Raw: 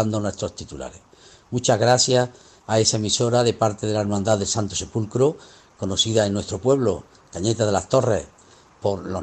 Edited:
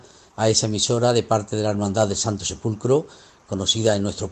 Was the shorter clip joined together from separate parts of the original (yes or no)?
no